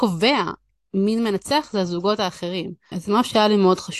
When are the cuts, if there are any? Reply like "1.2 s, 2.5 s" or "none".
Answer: 2.9 s